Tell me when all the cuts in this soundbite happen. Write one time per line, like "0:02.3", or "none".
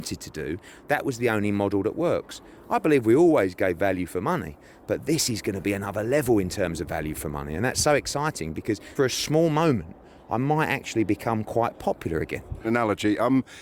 0:09.0
0:12.6